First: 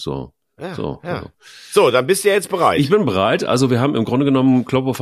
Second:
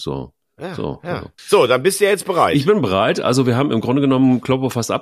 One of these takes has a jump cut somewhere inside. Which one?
second; 1 cut; at 1.4 s

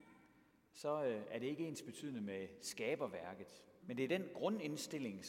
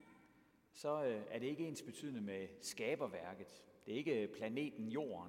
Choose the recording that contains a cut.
first; 1 cut; at 3.8 s

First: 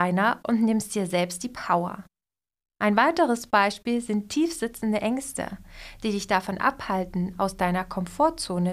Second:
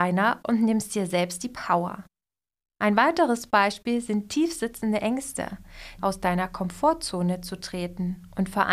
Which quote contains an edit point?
second; 1 cut; at 6.0 s

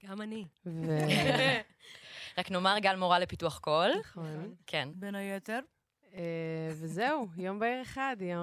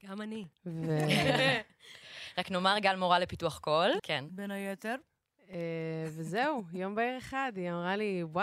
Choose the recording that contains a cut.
second; 1 cut; at 4.0 s

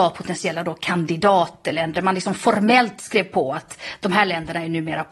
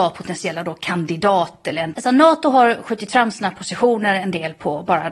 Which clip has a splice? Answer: second; 1 cut; at 1.9 s

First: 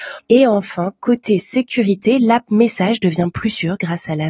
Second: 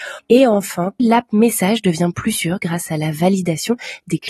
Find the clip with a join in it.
second; 1 cut; at 1.0 s

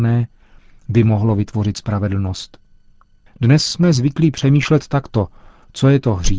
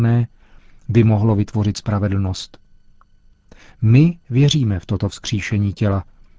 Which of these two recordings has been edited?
first; 1 cut; at 3.3 s

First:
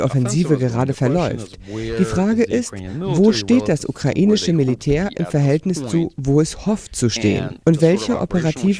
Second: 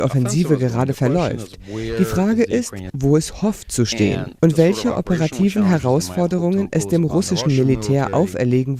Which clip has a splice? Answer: second; 1 cut; at 2.9 s

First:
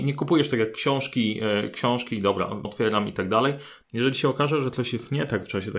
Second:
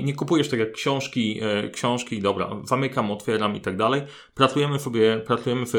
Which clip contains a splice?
first; 2 cuts; at 2.6 s, 3.8 s

